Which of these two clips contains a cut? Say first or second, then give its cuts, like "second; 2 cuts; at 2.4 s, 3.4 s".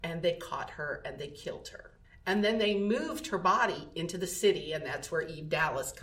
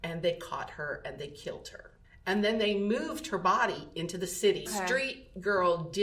second; 1 cut; at 4.7 s